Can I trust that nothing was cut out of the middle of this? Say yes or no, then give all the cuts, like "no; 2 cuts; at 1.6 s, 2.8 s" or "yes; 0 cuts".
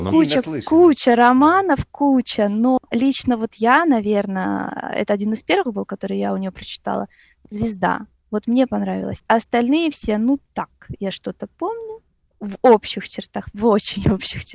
yes; 0 cuts